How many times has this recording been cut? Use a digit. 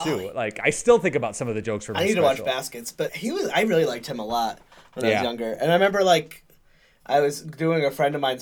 1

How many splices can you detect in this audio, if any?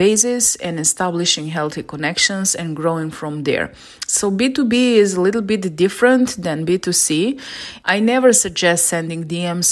1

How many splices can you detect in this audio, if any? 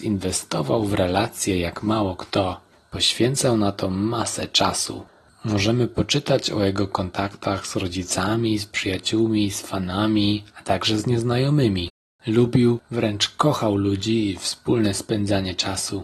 0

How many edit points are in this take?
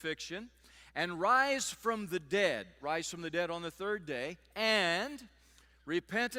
1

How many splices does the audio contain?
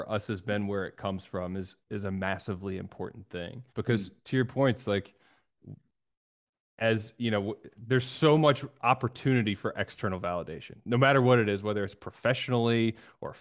1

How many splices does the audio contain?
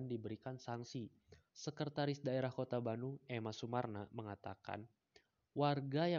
1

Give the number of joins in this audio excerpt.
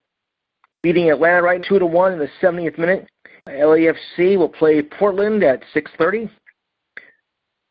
2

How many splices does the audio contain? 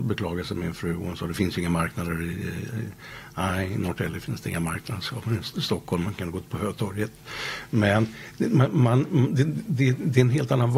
0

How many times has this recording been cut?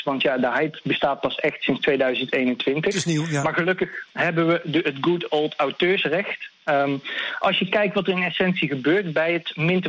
0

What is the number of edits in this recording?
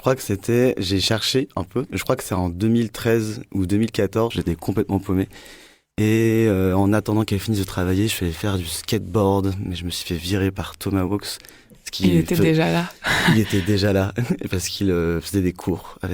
1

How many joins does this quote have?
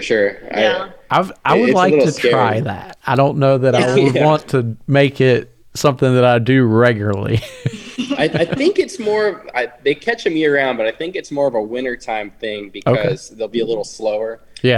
0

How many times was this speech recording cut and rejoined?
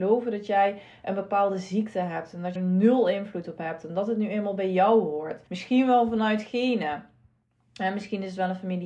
2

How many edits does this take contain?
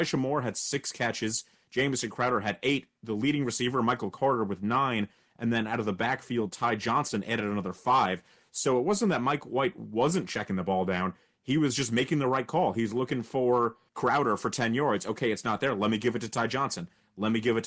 0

